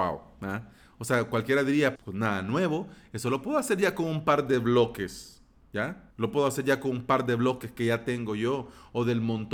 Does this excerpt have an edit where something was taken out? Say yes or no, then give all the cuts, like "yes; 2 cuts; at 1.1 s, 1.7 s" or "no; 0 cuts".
yes; 2 cuts; at 2.0 s, 6.1 s